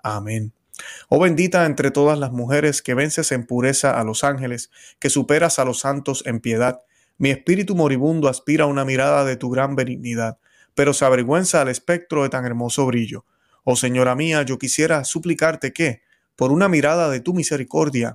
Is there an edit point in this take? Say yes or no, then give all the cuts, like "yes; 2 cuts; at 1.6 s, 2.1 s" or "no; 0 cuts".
no; 0 cuts